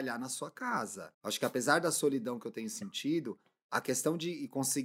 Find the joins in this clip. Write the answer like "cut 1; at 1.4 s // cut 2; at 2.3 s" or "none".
cut 1; at 1.1 s

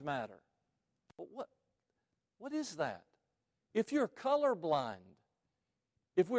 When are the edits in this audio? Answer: none

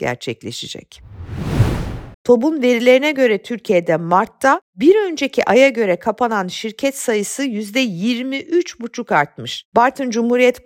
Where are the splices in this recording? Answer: cut 1; at 2.1 s // cut 2; at 9.7 s

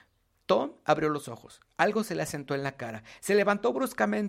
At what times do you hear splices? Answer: cut 1; at 3.2 s

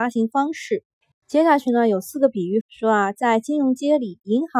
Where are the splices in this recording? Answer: cut 1; at 1.1 s // cut 2; at 2.6 s

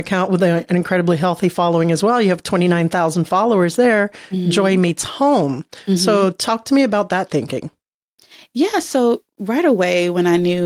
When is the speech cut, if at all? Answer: none

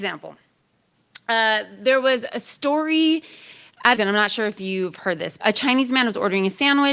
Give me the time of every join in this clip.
cut 1; at 3.9 s // cut 2; at 5.4 s

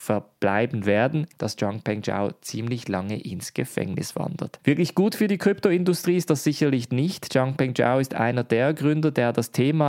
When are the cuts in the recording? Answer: cut 1; at 1.3 s

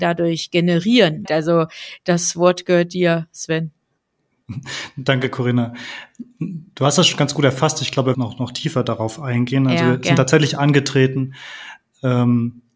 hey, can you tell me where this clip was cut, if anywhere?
cut 1; at 1.3 s // cut 2; at 8.1 s

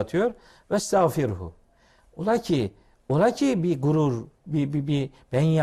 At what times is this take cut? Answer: cut 1; at 4.4 s

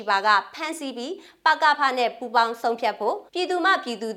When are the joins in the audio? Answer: cut 1; at 3.3 s

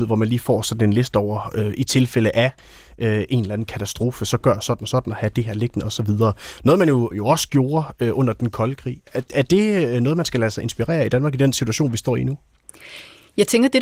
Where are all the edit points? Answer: cut 1; at 7.1 s

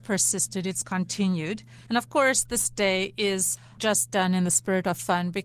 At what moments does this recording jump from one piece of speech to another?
cut 1; at 1.9 s

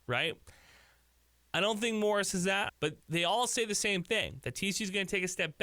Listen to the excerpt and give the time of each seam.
cut 1; at 2.7 s

